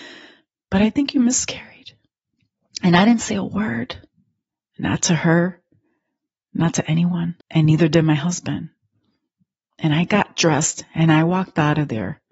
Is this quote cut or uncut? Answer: cut